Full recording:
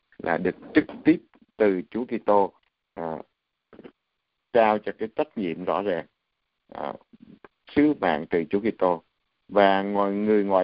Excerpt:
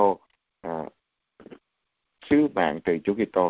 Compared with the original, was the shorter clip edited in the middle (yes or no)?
yes